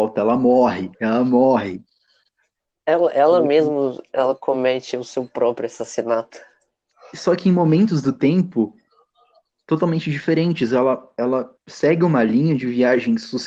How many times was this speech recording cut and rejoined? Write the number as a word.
zero